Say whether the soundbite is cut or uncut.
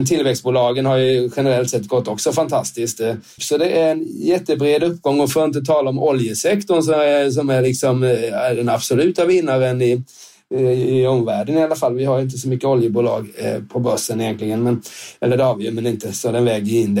cut